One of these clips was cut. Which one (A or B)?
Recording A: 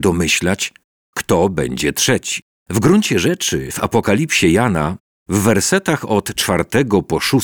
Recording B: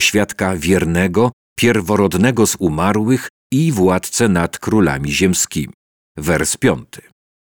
A